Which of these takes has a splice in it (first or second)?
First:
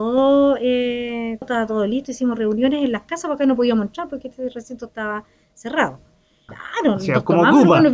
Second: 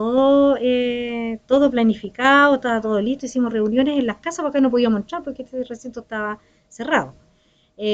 first